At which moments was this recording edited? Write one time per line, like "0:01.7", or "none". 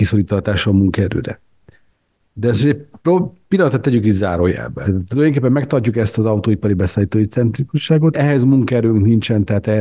0:04.8
0:08.1